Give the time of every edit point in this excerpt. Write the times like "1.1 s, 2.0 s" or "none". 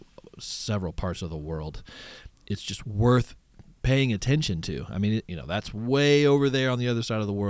5.2 s

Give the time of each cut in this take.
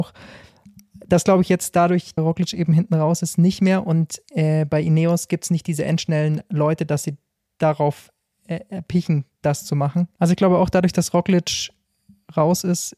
2.2 s, 10.2 s

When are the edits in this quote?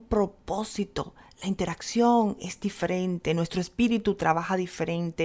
none

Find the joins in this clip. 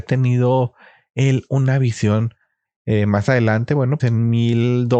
2.6 s, 4.0 s

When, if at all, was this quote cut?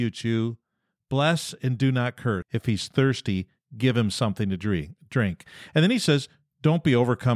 2.4 s

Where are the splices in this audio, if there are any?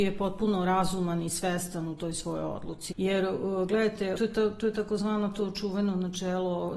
2.9 s, 4.2 s

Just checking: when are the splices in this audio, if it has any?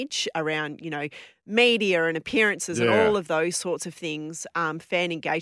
none

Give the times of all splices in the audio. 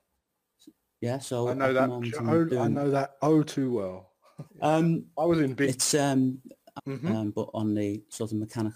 4.5 s, 5.6 s, 6.8 s

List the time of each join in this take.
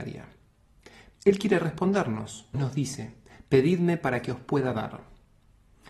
1.1 s, 2.5 s

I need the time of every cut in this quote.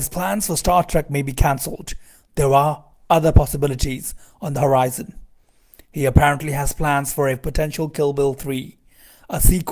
none

